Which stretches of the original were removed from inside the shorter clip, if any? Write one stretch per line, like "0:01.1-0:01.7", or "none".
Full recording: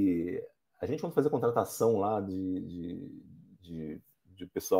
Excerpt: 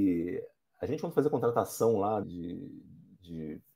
0:02.2-0:02.6